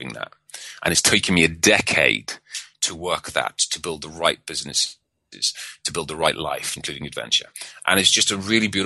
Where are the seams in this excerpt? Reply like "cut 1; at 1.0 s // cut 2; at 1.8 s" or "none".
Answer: cut 1; at 6.8 s